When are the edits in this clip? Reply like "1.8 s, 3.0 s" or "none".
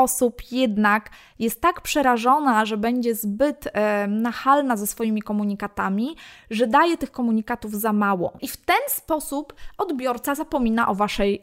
8.4 s

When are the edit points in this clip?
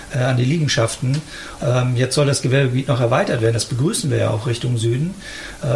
1.6 s

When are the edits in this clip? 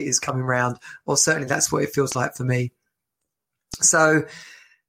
none

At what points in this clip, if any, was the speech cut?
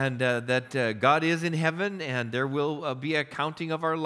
none

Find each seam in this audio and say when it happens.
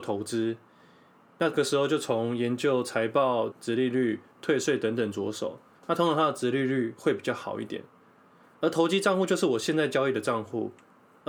3.5 s, 5.7 s

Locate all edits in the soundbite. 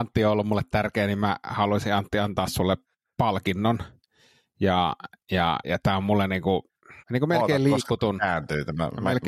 5.6 s, 7.0 s

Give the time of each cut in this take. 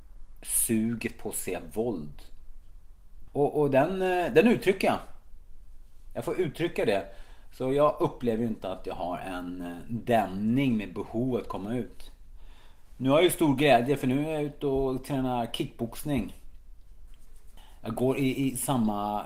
3.3 s

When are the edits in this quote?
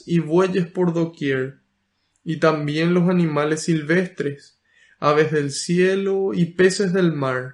none

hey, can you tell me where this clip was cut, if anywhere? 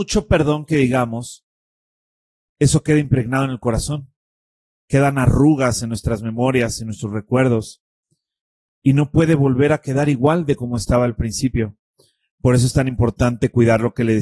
none

